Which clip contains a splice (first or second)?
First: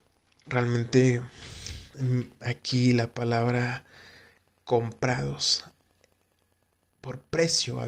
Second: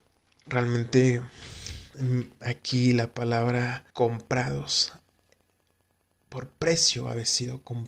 second